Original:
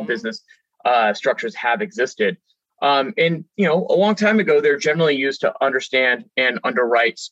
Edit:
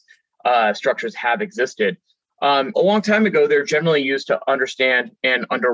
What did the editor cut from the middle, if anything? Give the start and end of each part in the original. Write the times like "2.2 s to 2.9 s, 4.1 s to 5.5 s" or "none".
3.1 s to 3.9 s

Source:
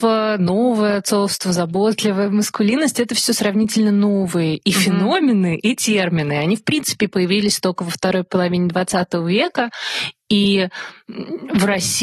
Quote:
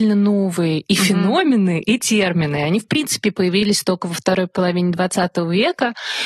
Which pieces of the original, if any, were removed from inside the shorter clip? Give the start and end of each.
none

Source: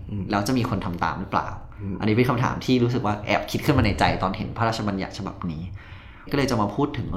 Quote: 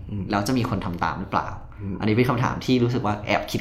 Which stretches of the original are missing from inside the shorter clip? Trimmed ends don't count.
none

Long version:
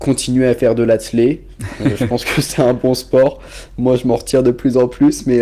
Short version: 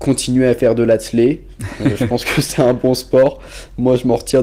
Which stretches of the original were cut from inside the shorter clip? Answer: none

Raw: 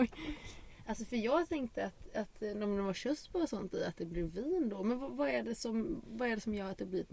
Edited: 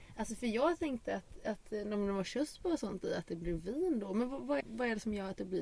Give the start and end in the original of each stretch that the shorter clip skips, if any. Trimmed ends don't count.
5.3 s to 6.0 s

